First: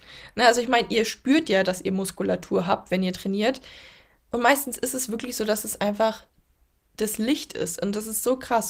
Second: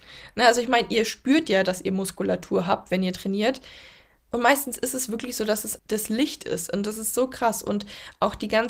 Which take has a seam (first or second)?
second